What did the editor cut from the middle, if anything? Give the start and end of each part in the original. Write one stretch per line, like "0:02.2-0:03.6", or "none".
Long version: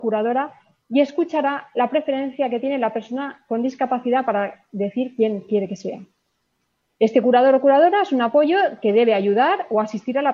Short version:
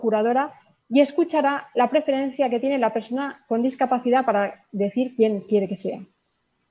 none